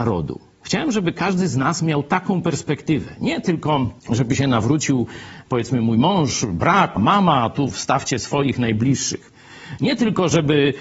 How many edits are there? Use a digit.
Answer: 2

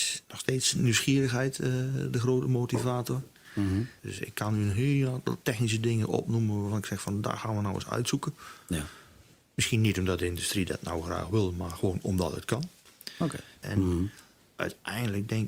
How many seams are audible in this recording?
2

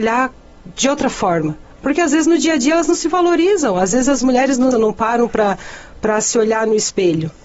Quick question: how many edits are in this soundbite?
2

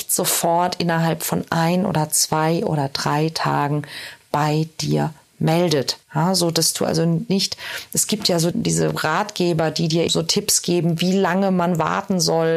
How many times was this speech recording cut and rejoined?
3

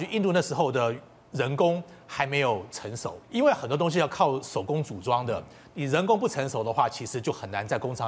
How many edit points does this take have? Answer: 1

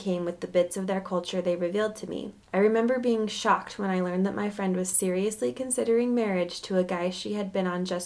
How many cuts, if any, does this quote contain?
1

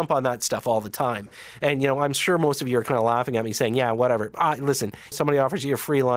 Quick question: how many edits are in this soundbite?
1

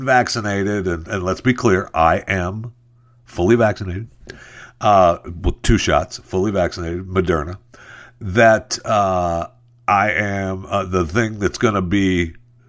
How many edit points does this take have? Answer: 0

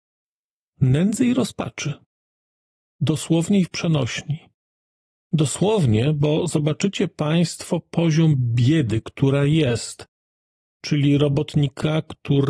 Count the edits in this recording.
0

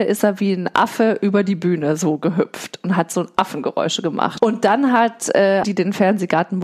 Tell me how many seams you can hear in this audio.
2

